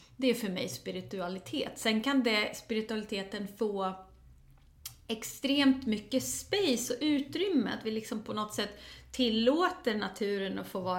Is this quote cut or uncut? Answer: uncut